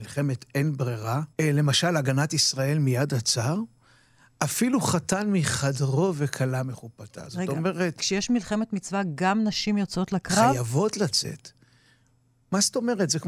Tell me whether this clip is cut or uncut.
cut